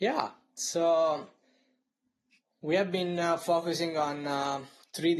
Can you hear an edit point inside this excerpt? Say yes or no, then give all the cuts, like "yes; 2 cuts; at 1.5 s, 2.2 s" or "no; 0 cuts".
no; 0 cuts